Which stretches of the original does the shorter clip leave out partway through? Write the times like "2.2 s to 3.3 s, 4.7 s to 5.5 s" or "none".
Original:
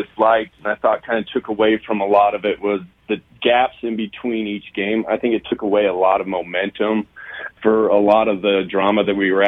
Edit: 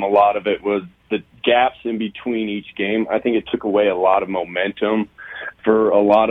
none